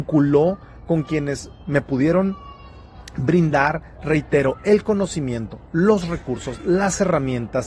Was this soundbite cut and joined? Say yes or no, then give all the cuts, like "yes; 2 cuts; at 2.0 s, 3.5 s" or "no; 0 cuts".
no; 0 cuts